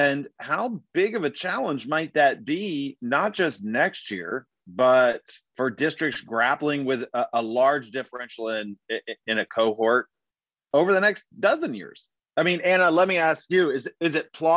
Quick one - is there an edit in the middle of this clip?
no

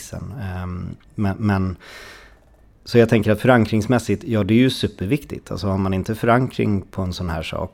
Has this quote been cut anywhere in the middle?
no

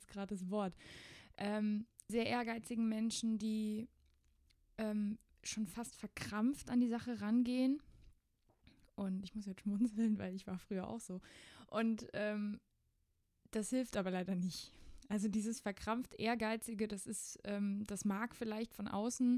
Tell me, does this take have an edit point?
yes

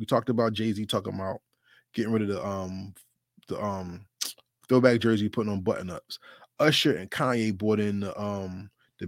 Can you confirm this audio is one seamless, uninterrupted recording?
yes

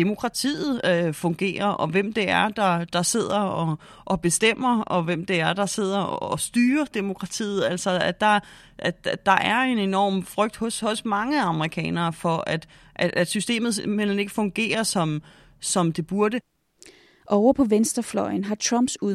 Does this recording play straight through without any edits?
yes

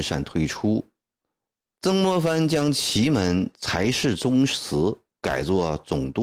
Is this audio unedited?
no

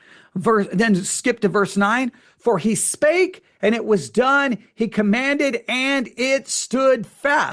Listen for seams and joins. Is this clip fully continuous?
yes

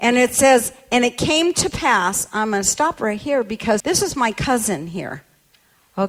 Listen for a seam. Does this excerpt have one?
yes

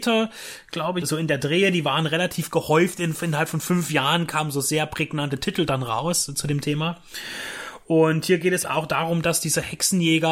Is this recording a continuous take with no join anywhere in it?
no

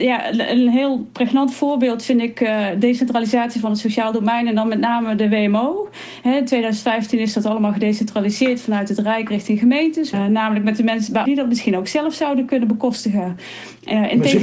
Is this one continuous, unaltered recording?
no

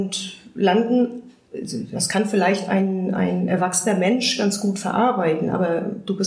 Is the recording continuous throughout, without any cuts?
yes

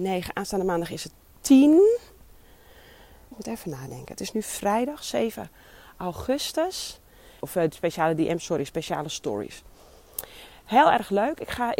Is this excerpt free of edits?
no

